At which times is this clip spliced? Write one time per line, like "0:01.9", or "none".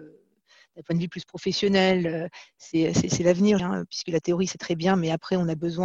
0:03.6